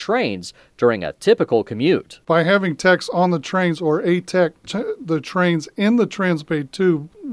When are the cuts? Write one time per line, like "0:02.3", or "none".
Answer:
0:04.6